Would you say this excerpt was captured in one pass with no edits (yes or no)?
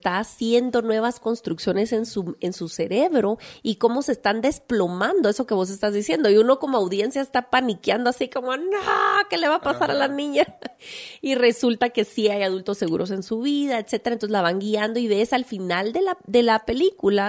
yes